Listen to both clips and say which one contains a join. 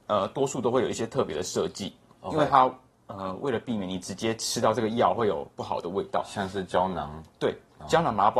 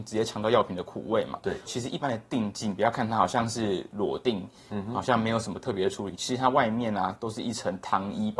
second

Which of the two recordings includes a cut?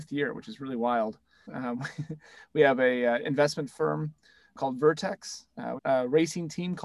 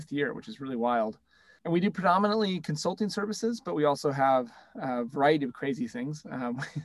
first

